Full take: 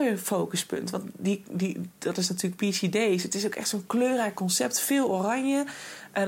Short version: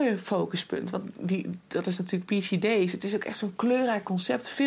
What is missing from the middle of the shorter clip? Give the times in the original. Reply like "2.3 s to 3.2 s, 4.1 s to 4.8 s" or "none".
1.1 s to 1.4 s